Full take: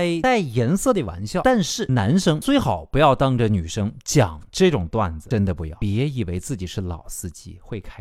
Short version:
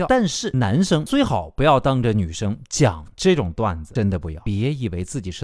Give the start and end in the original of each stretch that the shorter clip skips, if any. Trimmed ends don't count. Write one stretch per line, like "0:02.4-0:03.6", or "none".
none